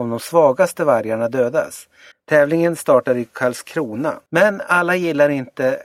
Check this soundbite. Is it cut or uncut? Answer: cut